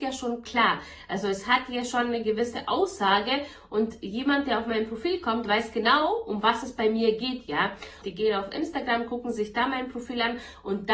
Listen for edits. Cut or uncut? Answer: cut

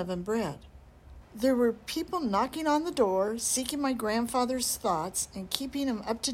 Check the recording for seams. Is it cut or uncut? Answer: cut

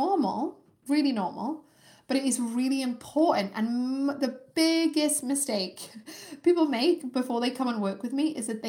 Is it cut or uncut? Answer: uncut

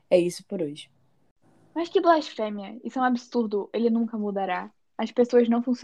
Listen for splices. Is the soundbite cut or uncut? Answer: uncut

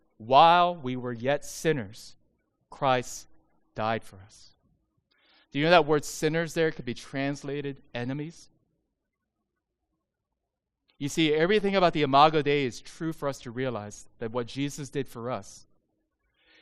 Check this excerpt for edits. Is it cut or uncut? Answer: uncut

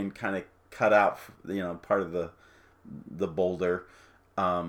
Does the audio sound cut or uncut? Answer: uncut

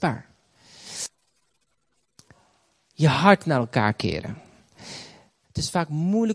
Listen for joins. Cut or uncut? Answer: cut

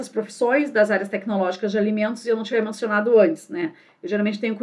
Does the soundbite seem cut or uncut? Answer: uncut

